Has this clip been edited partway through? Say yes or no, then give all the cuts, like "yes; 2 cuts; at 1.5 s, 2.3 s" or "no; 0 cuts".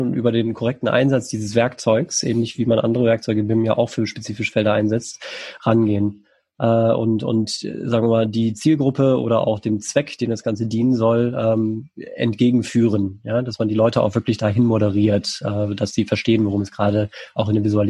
no; 0 cuts